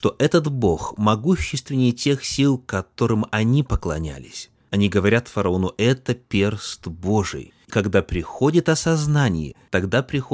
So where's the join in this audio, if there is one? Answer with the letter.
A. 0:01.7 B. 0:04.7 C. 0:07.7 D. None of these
C